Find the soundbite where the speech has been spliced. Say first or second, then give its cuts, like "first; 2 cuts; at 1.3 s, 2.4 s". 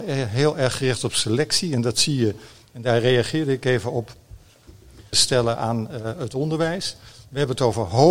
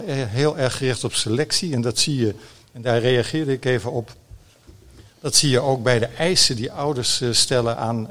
first; 1 cut; at 5.1 s